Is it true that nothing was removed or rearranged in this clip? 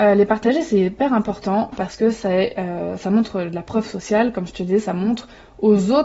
yes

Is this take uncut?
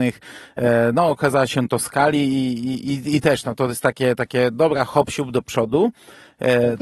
yes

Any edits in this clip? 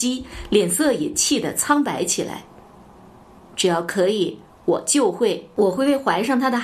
no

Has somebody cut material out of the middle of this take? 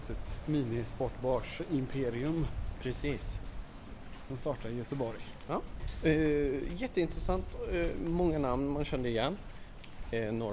no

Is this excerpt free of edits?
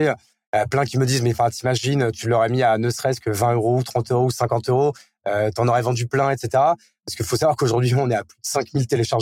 yes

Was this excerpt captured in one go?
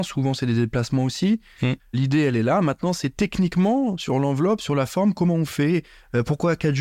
no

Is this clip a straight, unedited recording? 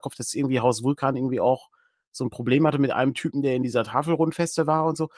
yes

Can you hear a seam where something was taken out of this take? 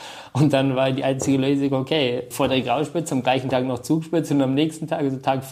yes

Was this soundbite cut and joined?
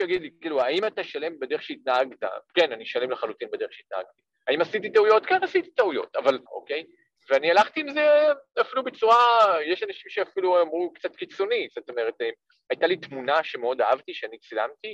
yes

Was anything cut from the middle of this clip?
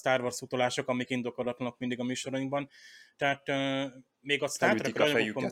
no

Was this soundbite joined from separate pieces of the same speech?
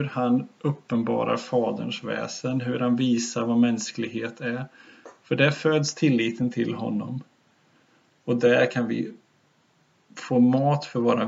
no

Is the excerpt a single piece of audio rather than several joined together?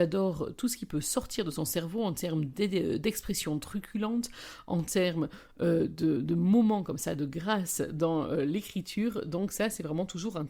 yes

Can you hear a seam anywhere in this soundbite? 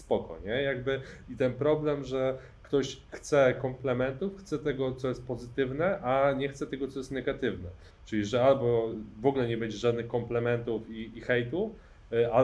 yes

